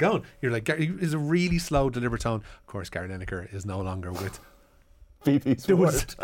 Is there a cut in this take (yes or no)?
no